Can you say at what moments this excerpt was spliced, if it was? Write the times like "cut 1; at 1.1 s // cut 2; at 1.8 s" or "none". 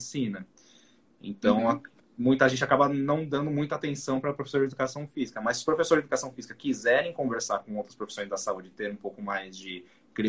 none